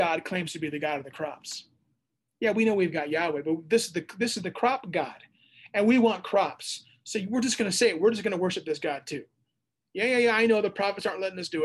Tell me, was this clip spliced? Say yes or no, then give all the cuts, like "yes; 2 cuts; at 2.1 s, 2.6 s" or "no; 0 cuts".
no; 0 cuts